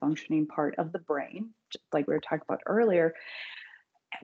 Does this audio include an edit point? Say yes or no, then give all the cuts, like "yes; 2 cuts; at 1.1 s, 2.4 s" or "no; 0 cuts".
no; 0 cuts